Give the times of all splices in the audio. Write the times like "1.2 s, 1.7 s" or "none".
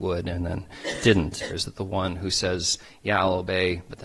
1.5 s